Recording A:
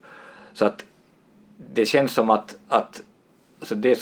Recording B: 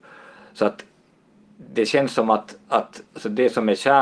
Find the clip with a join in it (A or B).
B